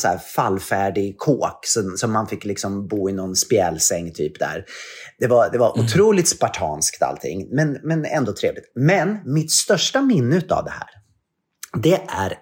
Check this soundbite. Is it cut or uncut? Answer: uncut